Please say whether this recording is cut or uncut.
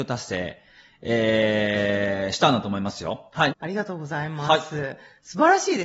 cut